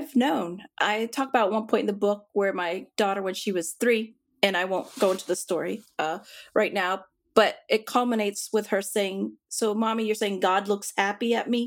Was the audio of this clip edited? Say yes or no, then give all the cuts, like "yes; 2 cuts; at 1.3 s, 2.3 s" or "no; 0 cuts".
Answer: no; 0 cuts